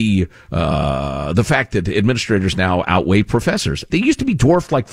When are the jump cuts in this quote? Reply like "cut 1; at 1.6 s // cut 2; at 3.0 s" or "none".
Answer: cut 1; at 3.9 s